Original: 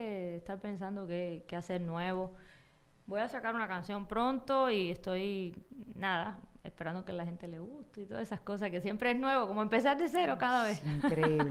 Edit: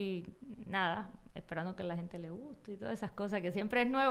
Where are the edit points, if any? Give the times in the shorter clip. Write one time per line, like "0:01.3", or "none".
none